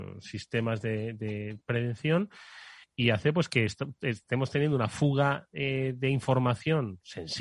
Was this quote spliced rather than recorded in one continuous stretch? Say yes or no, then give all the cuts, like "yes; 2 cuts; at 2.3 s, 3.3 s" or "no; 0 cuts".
no; 0 cuts